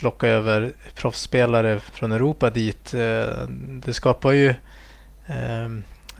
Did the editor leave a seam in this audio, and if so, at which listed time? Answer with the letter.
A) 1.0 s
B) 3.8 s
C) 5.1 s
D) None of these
B